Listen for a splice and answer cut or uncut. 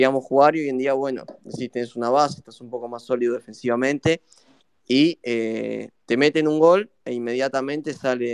uncut